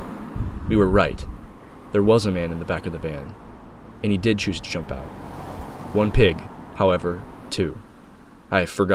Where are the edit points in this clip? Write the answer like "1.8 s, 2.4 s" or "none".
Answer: 7.5 s